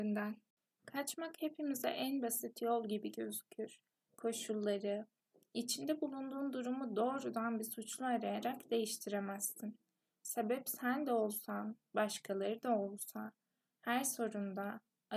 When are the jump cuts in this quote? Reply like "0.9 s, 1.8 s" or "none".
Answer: 4.1 s, 13.8 s